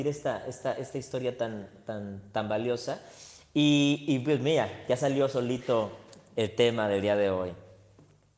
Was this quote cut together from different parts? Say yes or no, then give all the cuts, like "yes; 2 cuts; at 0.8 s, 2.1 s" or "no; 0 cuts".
no; 0 cuts